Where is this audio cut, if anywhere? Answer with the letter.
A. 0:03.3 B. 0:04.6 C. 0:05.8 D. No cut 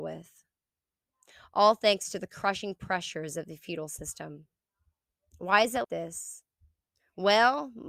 C